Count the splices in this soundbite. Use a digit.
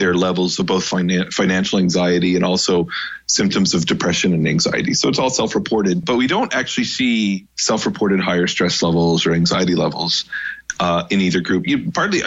1